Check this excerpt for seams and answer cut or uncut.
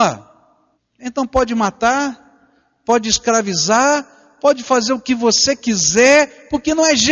uncut